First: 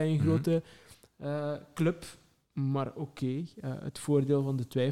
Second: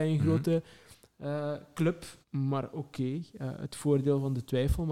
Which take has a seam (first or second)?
second